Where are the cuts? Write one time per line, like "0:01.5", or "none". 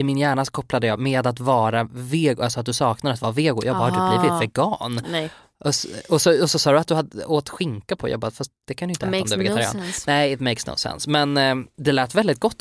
none